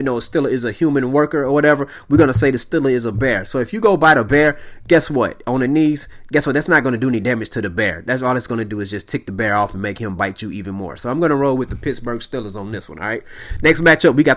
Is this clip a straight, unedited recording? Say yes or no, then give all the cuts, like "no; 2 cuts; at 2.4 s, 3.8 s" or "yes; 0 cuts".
yes; 0 cuts